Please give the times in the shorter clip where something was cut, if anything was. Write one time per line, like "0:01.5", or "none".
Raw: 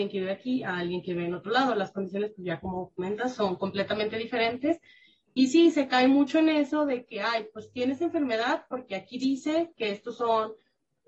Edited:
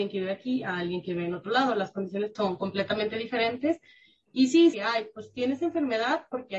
0:02.4
0:04.7